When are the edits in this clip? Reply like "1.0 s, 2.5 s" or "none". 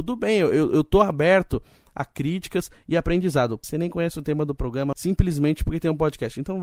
3.6 s, 4.9 s